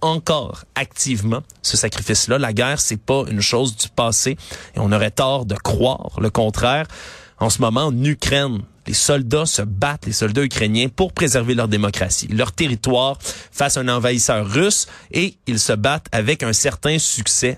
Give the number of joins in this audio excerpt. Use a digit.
1